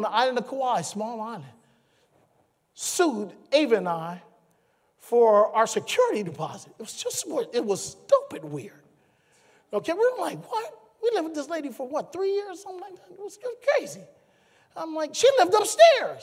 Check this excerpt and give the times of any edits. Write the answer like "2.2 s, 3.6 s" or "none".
none